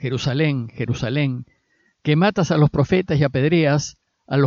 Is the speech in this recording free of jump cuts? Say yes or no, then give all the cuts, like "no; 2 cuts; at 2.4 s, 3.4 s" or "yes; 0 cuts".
yes; 0 cuts